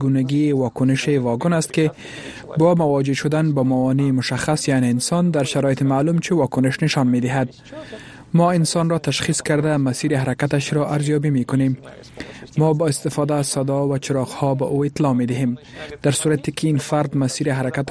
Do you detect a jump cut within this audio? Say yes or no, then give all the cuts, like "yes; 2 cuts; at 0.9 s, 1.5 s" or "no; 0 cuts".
yes; 1 cut; at 12.5 s